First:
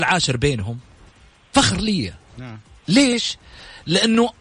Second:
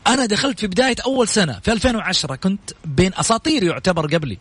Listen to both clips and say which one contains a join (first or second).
second